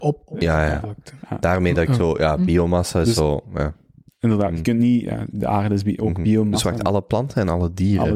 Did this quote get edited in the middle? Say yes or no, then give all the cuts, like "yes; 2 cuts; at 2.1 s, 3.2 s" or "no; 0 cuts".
no; 0 cuts